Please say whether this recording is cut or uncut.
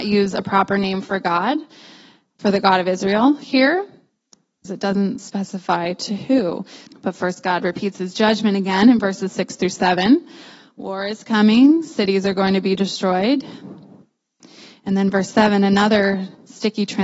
cut